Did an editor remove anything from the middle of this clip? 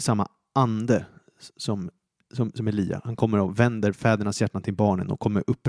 no; 0 cuts

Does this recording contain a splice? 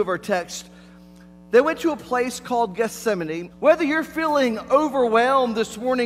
yes; 1 cut; at 3.5 s

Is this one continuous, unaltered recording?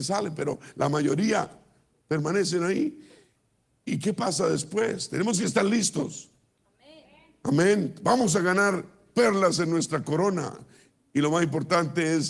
no; 1 cut; at 3.9 s

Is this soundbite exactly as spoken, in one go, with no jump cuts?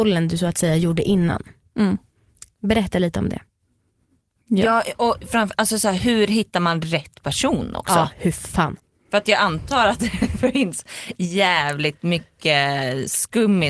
yes; 0 cuts

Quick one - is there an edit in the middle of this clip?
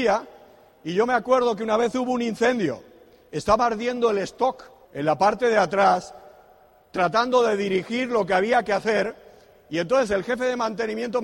yes; 1 cut; at 4.8 s

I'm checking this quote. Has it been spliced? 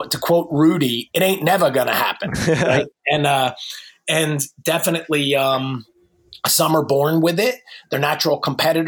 no; 0 cuts

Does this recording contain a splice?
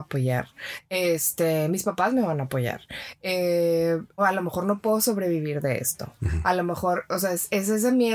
yes; 1 cut; at 4.2 s

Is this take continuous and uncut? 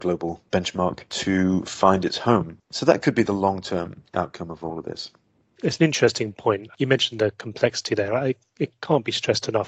yes; 0 cuts

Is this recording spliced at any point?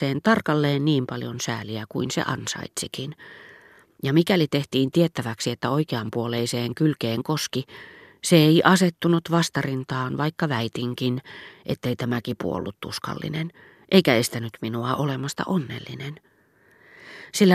no; 0 cuts

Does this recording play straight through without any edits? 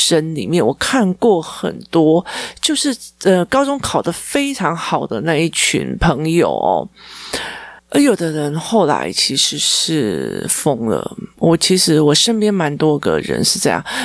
no; 1 cut; at 7.8 s

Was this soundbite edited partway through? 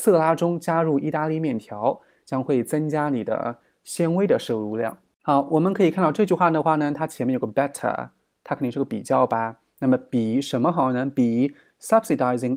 no; 0 cuts

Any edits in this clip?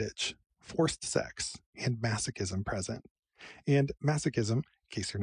no; 0 cuts

